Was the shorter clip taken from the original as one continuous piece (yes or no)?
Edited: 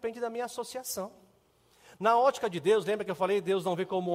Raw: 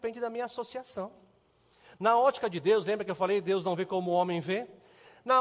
yes